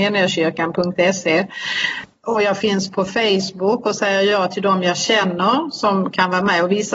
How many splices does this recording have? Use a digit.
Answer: 0